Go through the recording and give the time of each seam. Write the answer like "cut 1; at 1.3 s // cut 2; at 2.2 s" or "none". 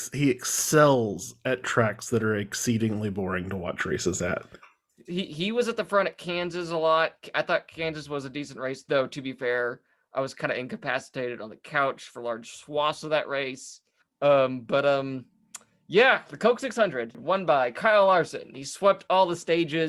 none